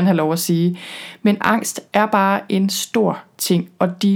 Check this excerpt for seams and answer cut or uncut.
uncut